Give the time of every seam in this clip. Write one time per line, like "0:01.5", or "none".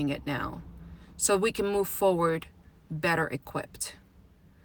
none